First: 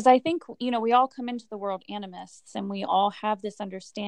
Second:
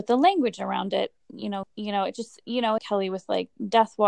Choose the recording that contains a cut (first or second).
second